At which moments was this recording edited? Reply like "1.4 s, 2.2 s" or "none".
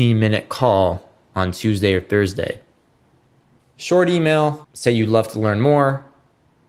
3.6 s, 4.6 s